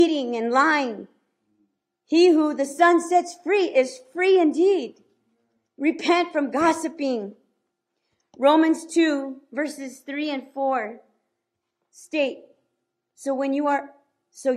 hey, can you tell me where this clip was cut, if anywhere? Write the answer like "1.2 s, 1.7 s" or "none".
none